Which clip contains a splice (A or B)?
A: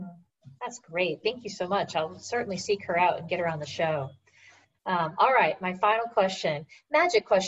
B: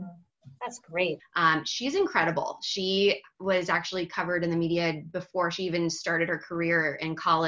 B